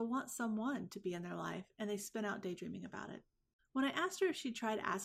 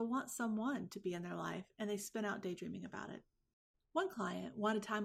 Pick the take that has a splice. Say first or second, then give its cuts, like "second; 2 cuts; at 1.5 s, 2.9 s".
first; 1 cut; at 3.6 s